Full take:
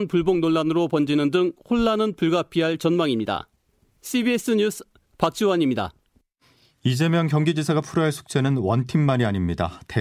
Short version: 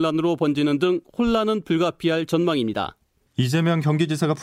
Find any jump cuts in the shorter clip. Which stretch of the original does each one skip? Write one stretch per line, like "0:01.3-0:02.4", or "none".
0:03.8-0:06.7